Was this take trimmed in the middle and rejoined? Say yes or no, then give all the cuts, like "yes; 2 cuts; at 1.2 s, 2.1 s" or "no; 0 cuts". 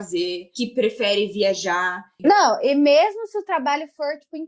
yes; 1 cut; at 2.2 s